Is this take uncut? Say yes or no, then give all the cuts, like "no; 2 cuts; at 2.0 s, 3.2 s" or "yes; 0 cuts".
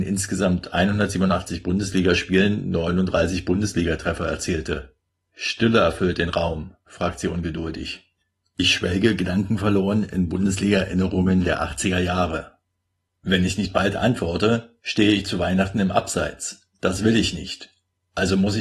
no; 1 cut; at 6.9 s